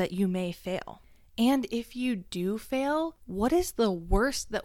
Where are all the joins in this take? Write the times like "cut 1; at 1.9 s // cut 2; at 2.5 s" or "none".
none